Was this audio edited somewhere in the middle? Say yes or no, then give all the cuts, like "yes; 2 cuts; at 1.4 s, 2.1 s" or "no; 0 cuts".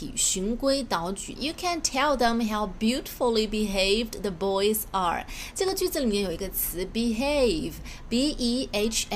yes; 1 cut; at 1.4 s